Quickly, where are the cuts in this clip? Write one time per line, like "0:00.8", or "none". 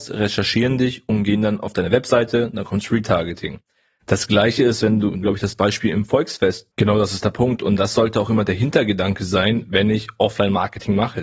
0:05.2
0:06.7